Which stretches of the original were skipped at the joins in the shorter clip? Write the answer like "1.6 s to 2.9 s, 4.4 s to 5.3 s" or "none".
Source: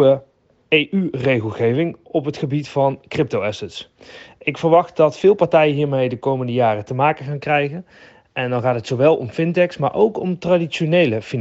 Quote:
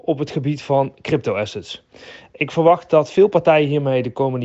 none